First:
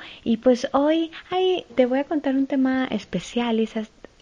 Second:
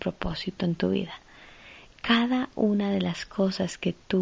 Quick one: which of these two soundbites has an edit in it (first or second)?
first